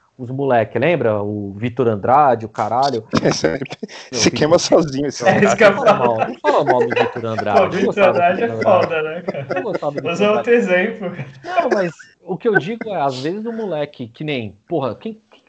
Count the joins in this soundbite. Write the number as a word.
zero